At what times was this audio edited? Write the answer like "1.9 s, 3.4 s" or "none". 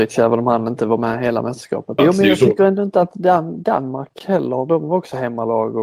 2.0 s